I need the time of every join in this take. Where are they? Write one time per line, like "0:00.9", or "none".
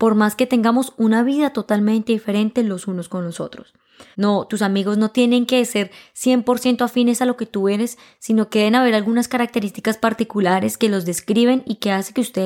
0:04.1